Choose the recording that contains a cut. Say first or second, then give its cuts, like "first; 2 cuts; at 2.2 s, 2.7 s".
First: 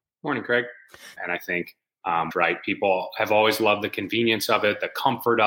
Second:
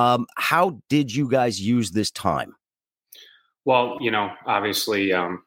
first; 2 cuts; at 1.2 s, 2.3 s